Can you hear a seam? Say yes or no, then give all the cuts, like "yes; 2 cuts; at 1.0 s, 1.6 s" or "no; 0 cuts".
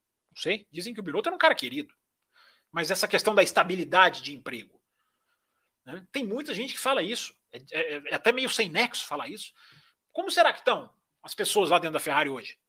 yes; 2 cuts; at 7.5 s, 9.9 s